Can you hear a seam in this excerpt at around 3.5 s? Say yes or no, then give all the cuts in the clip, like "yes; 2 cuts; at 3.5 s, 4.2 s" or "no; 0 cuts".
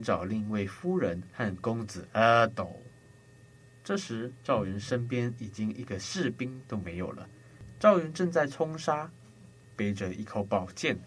no; 1 cut; at 9.8 s